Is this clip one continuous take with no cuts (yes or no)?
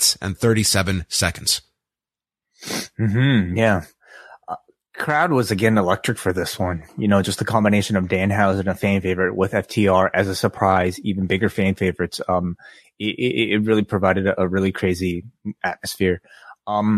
yes